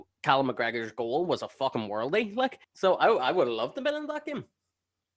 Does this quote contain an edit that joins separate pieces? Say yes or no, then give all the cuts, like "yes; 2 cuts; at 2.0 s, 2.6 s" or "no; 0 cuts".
yes; 1 cut; at 2.6 s